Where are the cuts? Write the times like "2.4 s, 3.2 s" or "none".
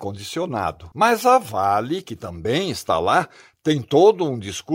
0.9 s